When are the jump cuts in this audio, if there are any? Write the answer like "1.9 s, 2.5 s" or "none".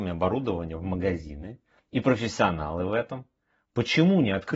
none